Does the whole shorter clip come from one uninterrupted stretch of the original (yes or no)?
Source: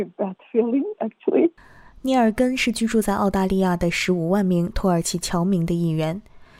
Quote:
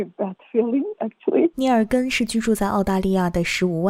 no